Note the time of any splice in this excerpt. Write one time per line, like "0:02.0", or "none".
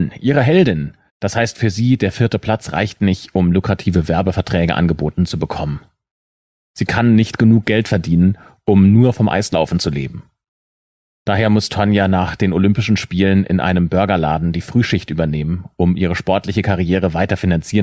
0:01.1